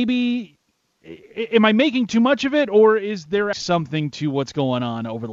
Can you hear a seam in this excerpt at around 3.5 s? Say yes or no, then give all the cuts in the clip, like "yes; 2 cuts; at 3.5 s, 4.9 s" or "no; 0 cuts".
yes; 1 cut; at 3.5 s